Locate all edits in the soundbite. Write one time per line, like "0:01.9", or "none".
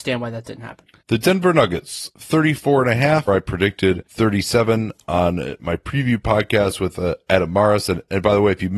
0:03.3

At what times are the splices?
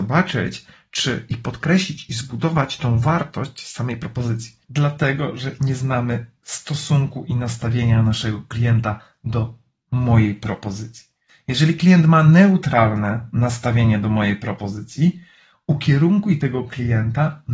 0:04.6
0:11.3

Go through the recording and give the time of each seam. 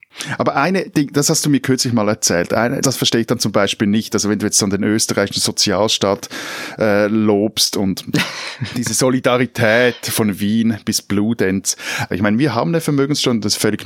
0:02.8
0:12.1

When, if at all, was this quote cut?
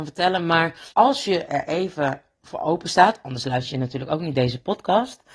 0:00.9

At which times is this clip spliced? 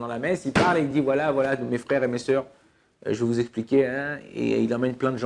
none

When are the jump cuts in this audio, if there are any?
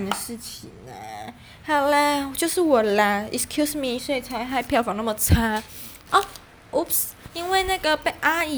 0:04.0
0:06.1

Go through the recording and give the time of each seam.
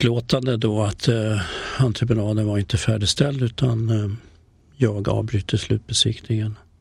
none

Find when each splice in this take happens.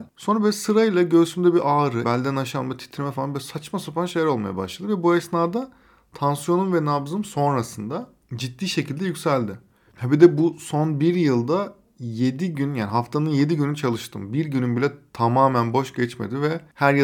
0:02.0
0:09.9

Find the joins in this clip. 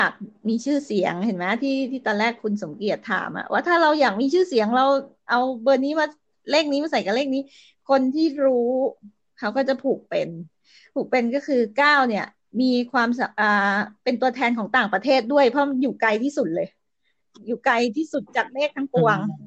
none

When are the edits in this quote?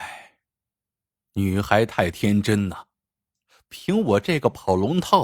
none

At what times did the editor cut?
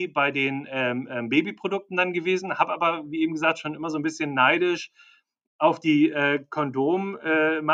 none

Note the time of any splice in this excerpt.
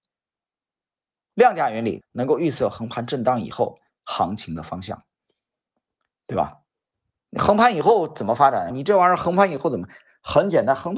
0:02.0
0:08.7

